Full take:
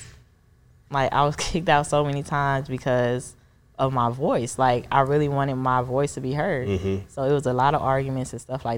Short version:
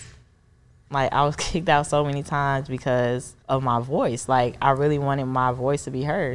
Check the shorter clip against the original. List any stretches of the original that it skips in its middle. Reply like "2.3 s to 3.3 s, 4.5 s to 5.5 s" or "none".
3.4 s to 3.7 s

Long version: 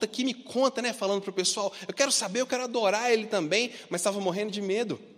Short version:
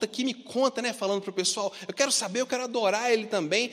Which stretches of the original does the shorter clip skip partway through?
none

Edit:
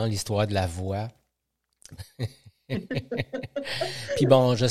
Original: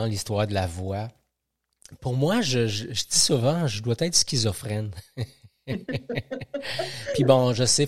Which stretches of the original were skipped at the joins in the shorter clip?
2.0 s to 4.9 s

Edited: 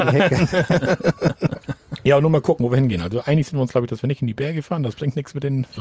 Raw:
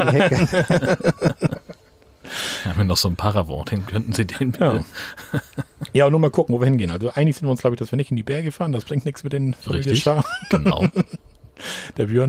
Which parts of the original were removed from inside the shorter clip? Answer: 1.6 s to 5.5 s

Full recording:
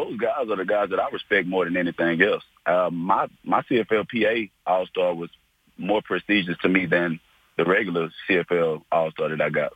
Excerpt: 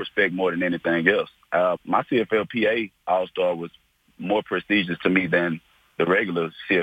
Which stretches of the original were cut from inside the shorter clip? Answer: 2.9 s to 3.3 s

